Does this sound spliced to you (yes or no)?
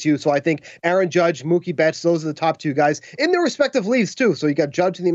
no